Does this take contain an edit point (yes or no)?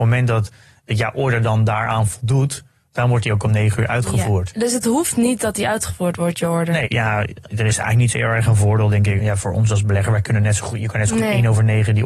yes